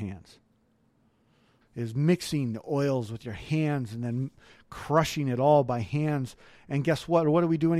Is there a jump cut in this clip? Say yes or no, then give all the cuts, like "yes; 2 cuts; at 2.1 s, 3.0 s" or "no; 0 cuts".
yes; 1 cut; at 1.6 s